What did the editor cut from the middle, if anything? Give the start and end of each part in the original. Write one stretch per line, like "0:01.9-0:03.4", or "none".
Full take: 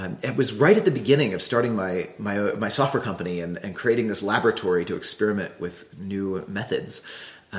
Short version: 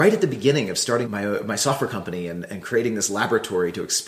0:01.7-0:02.2